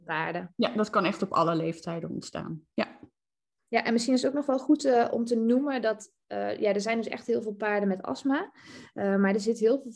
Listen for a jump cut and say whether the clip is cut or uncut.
uncut